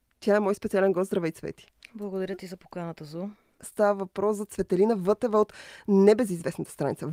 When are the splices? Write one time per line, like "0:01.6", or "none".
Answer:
0:01.9
0:03.6

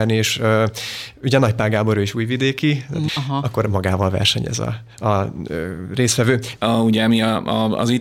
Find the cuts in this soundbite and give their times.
0:03.1
0:06.6

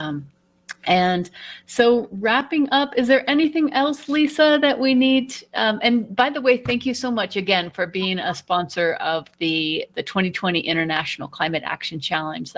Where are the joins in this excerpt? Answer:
none

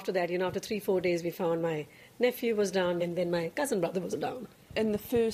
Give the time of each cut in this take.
0:03.0
0:04.1

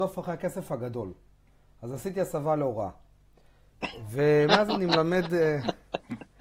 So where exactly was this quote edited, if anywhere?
none

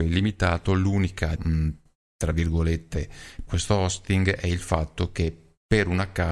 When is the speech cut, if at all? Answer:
0:01.4
0:03.5

